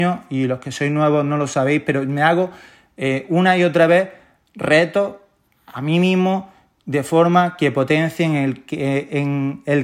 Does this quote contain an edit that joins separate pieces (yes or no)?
no